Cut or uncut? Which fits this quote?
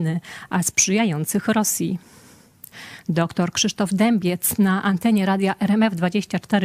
cut